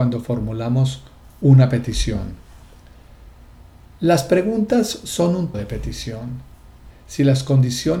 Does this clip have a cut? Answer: yes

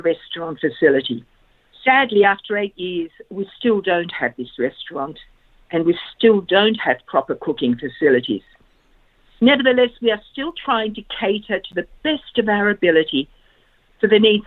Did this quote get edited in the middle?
no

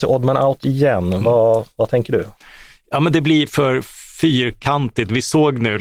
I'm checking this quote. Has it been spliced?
no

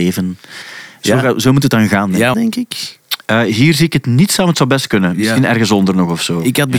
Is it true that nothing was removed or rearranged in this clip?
no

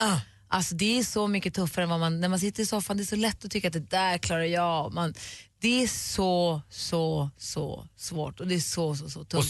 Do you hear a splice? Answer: no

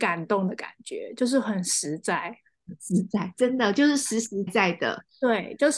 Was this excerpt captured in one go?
no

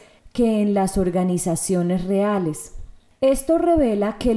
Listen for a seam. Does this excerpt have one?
no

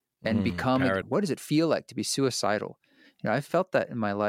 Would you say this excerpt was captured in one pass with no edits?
no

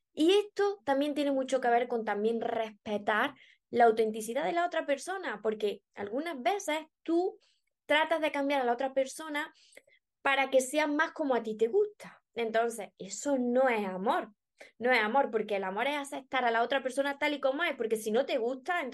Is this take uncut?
yes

